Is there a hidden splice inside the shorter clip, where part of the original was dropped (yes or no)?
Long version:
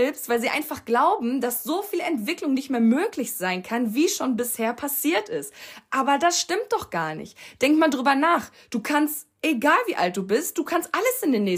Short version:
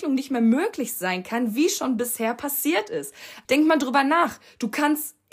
yes